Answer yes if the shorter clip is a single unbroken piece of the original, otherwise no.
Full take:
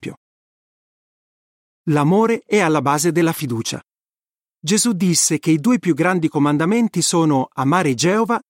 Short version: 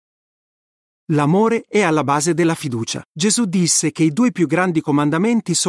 no